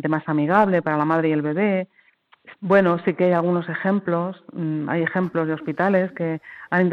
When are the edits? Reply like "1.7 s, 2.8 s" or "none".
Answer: 2.5 s